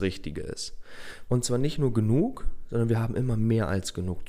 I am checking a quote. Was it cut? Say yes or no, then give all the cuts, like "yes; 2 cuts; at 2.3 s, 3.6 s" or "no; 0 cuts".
yes; 1 cut; at 1.3 s